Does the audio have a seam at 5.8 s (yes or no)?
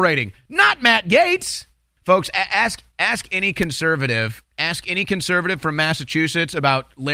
no